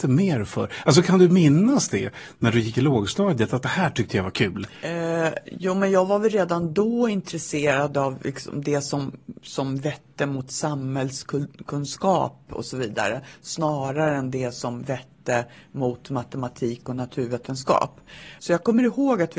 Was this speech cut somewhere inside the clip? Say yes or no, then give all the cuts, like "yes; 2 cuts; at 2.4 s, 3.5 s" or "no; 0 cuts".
yes; 1 cut; at 18.4 s